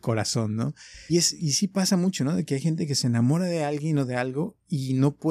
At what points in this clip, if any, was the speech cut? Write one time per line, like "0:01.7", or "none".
0:01.1